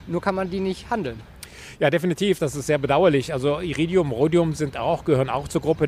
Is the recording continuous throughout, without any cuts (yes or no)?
yes